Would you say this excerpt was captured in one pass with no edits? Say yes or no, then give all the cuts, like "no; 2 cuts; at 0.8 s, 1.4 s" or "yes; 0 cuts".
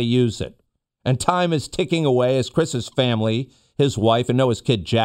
yes; 0 cuts